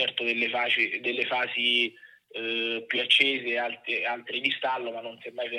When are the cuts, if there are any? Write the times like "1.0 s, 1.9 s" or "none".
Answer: none